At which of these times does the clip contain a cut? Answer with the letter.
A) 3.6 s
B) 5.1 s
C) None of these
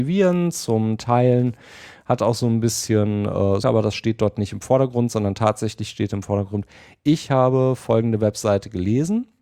A